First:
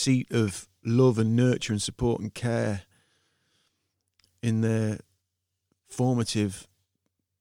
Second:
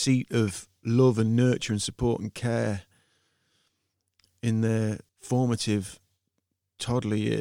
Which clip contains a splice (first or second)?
second